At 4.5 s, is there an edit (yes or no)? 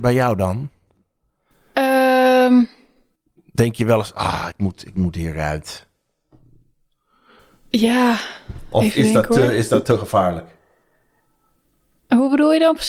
no